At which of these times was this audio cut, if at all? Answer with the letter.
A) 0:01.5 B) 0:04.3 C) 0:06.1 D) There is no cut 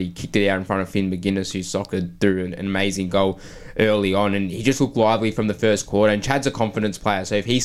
D